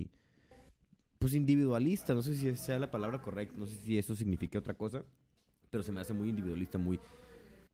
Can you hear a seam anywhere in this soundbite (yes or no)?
no